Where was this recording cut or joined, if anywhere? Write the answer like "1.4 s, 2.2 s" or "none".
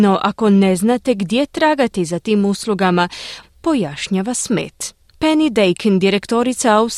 3.4 s

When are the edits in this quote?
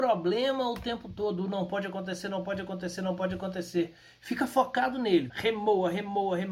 5.3 s

